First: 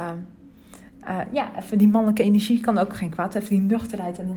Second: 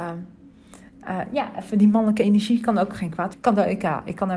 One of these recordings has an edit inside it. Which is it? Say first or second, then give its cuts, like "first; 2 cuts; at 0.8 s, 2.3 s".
second; 1 cut; at 3.3 s